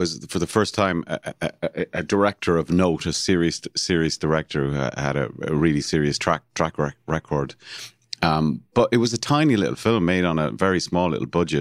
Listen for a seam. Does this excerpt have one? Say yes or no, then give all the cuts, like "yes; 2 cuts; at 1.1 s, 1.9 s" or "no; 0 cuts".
no; 0 cuts